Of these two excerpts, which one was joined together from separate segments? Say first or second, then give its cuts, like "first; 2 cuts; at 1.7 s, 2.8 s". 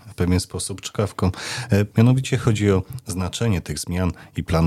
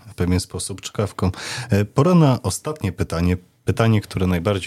first; 1 cut; at 1.9 s